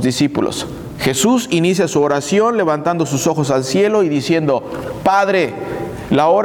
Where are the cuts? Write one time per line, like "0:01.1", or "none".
0:01.0